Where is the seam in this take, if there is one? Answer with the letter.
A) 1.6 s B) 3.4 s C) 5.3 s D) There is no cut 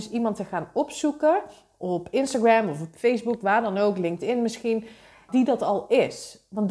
C